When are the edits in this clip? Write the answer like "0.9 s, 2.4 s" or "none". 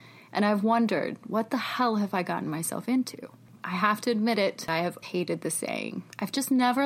3.6 s, 5.0 s